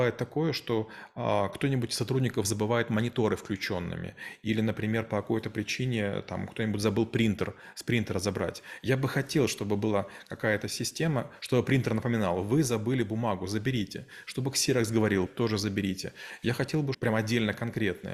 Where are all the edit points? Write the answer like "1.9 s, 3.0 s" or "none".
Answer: 15.3 s, 16.9 s

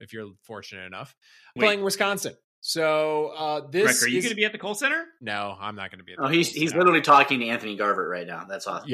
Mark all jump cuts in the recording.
1.6 s

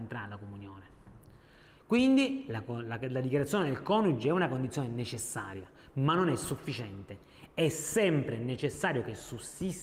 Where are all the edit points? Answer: none

